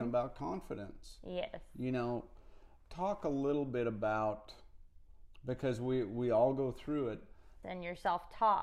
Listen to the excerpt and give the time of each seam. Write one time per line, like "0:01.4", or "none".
0:07.6